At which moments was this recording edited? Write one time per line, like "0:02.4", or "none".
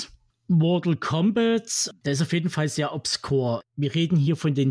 0:02.0